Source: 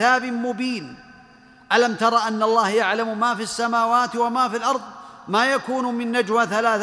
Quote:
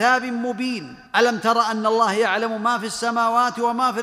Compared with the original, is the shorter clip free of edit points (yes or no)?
no